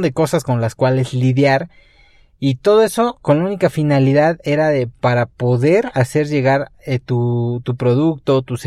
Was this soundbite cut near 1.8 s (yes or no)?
no